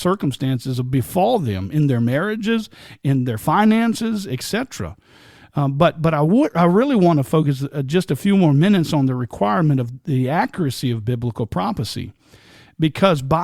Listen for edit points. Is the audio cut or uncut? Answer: uncut